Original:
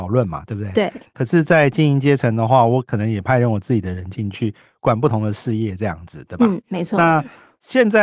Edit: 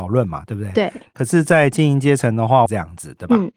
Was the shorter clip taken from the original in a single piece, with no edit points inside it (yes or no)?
no